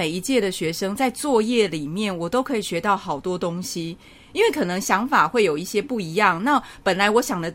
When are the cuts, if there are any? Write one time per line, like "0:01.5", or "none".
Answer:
none